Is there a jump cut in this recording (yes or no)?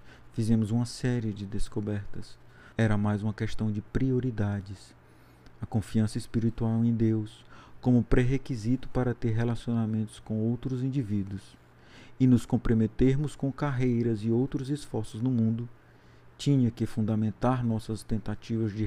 yes